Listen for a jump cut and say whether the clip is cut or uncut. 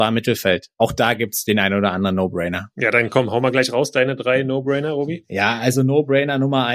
uncut